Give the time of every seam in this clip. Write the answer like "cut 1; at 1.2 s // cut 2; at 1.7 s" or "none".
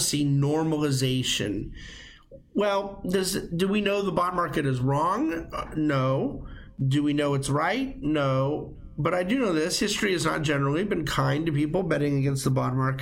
none